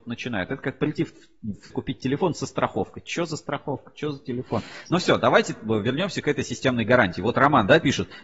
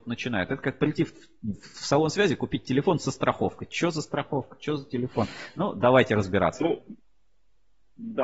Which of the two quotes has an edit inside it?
first; 2 cuts; at 1.7 s, 4.9 s

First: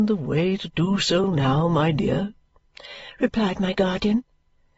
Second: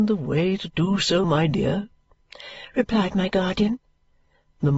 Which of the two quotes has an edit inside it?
second; 1 cut; at 1.2 s

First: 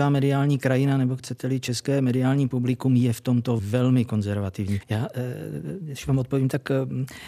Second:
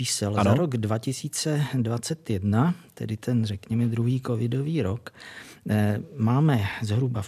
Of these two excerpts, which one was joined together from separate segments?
first; 2 cuts; at 3.6 s, 4.8 s

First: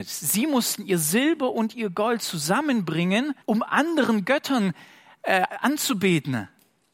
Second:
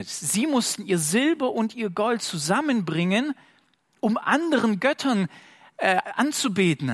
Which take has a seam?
first; 1 cut; at 3.4 s

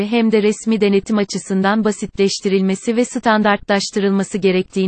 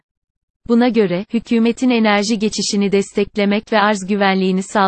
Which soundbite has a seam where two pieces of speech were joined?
second; 1 cut; at 1.3 s

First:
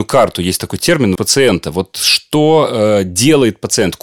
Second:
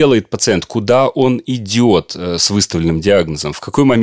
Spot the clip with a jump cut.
first; 1 cut; at 1.2 s

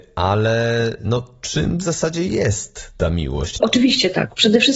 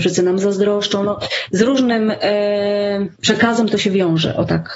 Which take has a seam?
first; 1 cut; at 3.6 s

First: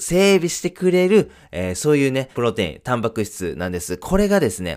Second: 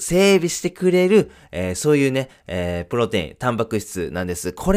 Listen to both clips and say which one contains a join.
first; 1 cut; at 2.3 s

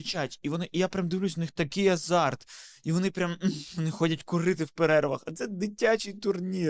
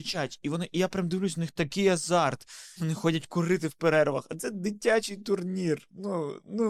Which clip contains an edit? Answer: second; 1 cut; at 2.8 s

